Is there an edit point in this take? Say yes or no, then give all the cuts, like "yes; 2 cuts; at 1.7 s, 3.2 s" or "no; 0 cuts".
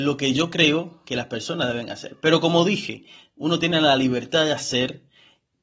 no; 0 cuts